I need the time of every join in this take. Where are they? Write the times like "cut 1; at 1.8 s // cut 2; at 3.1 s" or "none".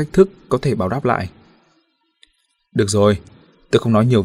none